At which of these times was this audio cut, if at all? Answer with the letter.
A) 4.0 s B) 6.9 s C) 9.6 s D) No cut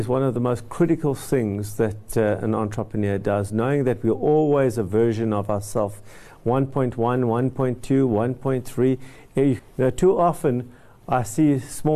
C